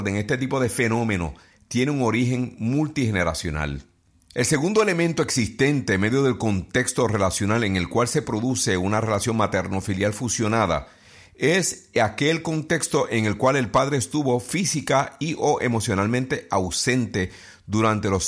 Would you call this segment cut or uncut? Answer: uncut